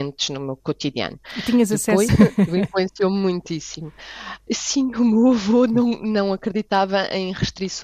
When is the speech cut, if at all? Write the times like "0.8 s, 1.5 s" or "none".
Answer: 2.1 s, 4.5 s